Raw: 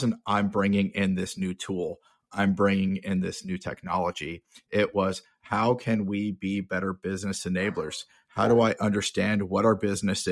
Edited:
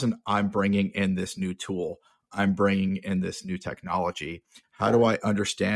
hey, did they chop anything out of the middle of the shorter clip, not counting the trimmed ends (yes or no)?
yes